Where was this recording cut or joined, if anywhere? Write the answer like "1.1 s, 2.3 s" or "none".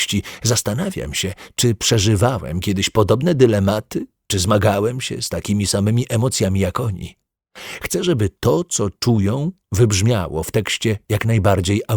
none